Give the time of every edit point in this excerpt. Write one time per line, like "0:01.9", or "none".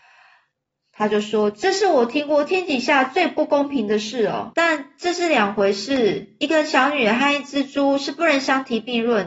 0:04.5